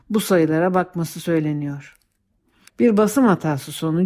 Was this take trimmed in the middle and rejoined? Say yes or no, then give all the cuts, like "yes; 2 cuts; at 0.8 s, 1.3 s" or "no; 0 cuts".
yes; 1 cut; at 2.7 s